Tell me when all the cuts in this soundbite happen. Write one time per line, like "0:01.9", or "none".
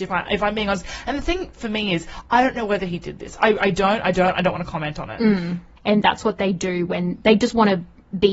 0:05.8